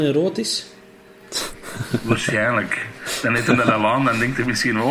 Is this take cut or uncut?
uncut